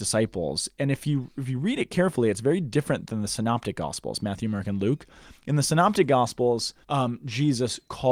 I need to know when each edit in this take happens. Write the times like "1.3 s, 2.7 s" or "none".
6.8 s

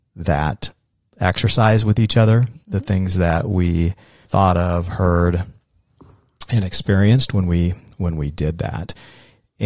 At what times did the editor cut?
none

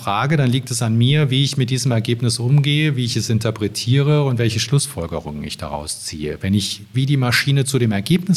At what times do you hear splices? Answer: 6.9 s

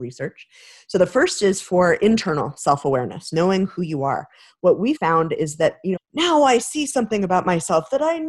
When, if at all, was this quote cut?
5.0 s, 6.0 s

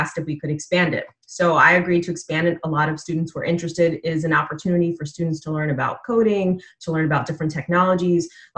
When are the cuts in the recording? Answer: none

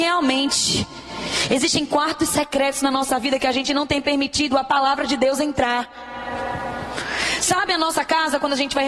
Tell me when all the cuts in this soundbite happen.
1.5 s

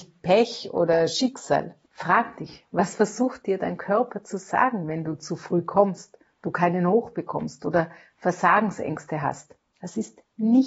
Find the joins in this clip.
none

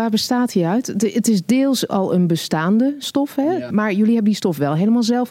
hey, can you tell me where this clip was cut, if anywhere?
3.7 s

